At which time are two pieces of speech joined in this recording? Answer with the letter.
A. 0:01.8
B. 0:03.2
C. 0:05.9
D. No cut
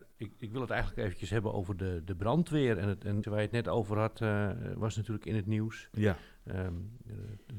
B